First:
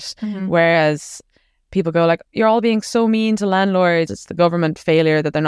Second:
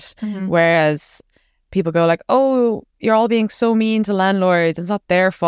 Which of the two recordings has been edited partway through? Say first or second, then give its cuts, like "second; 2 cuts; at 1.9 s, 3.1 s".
first; 2 cuts; at 2.2 s, 4.1 s